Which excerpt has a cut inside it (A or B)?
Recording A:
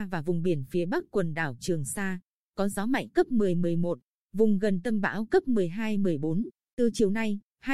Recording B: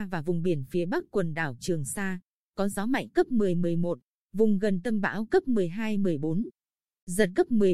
A